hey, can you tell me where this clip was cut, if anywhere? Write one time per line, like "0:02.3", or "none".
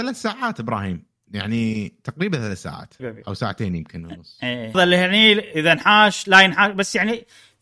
0:03.0
0:04.7